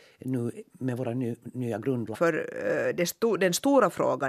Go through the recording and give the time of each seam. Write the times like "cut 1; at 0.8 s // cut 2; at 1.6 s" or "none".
cut 1; at 2.1 s